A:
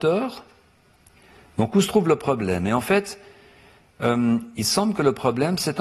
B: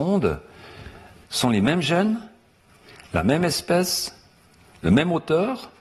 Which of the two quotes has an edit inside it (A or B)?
B